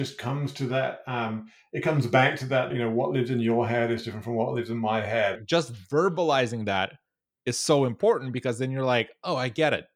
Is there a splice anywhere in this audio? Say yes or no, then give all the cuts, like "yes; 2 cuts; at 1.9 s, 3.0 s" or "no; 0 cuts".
yes; 2 cuts; at 2.7 s, 5.4 s